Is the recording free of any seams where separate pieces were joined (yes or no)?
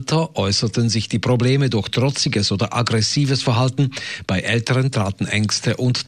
yes